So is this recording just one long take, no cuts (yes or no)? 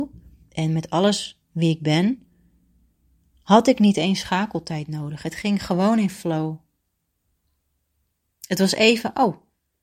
yes